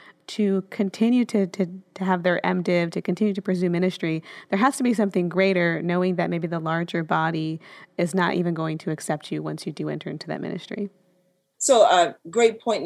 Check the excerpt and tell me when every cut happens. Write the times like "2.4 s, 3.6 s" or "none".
11.5 s